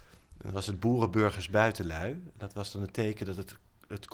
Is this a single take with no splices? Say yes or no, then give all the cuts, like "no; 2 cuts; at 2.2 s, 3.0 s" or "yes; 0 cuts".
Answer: yes; 0 cuts